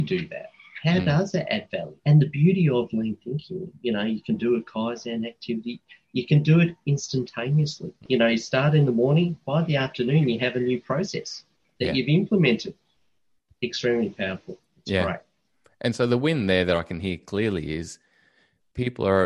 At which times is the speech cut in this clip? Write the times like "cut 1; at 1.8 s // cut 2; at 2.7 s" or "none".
cut 1; at 2.0 s

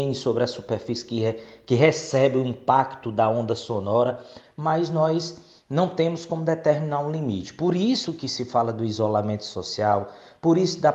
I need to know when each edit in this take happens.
none

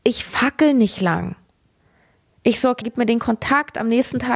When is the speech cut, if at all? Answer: cut 1; at 2.8 s

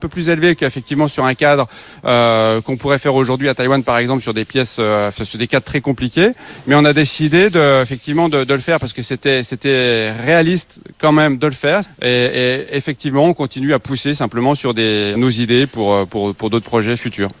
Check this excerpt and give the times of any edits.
cut 1; at 11.8 s // cut 2; at 15.1 s

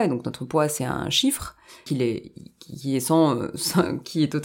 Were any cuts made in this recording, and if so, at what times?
cut 1; at 1.9 s

